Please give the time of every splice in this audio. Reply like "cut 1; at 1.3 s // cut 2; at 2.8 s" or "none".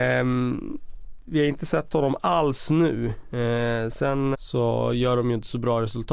cut 1; at 4.3 s